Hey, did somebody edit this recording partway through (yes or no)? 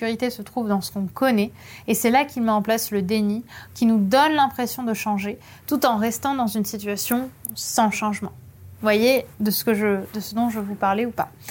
yes